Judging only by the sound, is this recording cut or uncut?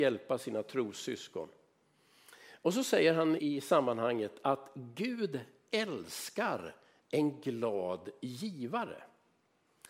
cut